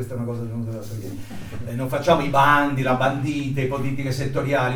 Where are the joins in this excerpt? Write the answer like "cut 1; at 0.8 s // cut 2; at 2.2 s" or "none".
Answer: cut 1; at 1.7 s